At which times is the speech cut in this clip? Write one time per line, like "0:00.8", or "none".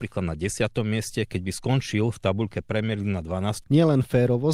0:03.6